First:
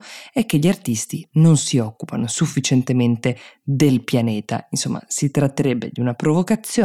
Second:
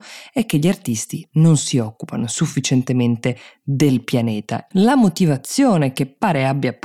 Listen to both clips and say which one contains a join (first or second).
second